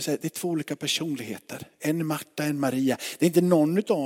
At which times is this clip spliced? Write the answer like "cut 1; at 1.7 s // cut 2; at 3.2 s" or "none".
none

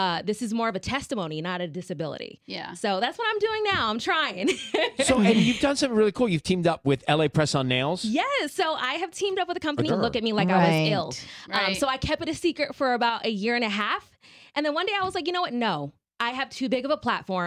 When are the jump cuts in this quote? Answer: cut 1; at 9.9 s

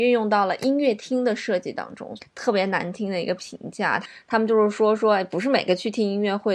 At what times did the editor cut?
cut 1; at 2.2 s

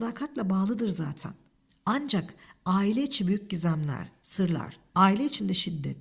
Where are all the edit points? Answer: cut 1; at 4.9 s

